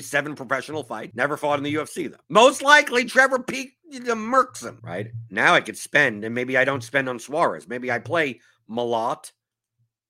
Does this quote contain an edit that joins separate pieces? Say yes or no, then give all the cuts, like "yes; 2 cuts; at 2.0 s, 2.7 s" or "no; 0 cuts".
yes; 3 cuts; at 1.1 s, 2.2 s, 4.8 s